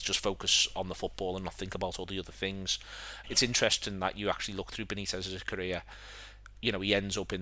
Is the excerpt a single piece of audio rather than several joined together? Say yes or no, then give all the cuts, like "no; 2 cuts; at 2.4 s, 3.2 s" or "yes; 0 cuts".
no; 1 cut; at 3.2 s